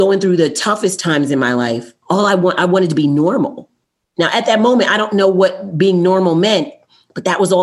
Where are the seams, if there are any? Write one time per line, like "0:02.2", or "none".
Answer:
0:02.0